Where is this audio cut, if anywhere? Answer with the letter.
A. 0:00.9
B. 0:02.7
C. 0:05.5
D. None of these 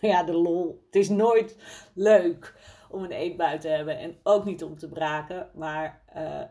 D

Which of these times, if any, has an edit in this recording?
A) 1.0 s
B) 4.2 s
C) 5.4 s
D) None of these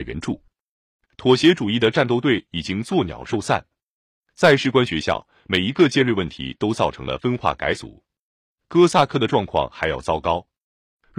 A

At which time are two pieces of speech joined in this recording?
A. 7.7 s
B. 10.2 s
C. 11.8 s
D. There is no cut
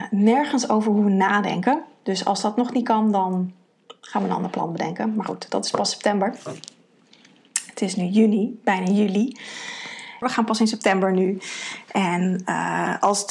B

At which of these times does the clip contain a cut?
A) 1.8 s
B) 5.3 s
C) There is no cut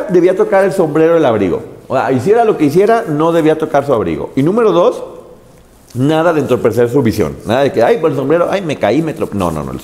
C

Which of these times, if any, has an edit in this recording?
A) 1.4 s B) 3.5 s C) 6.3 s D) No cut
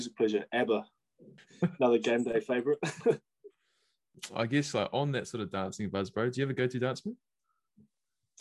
A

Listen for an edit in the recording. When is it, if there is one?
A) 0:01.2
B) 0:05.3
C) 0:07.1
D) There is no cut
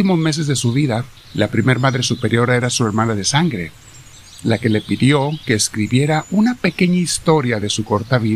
A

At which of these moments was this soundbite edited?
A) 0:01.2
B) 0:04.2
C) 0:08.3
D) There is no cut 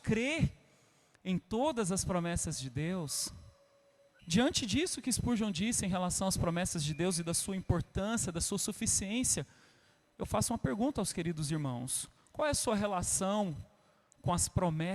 B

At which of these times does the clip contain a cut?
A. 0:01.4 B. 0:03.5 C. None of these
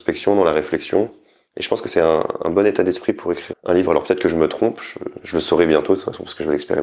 B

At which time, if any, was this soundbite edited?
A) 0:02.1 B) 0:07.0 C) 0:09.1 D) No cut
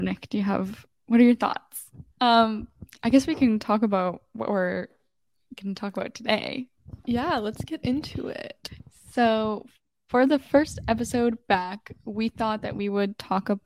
A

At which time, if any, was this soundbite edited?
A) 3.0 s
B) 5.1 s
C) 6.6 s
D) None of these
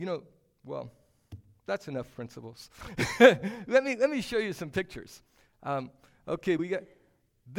D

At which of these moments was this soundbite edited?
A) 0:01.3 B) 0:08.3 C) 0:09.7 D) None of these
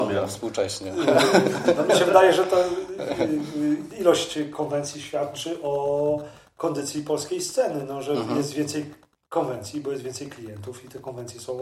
D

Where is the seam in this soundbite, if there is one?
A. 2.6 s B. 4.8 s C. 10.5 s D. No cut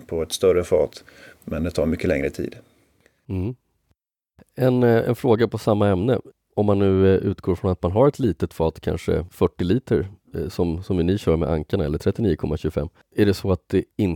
D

